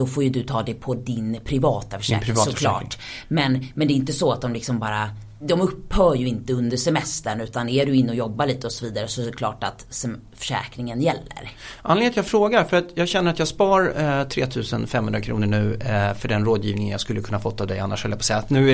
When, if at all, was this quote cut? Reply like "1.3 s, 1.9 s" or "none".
5.4 s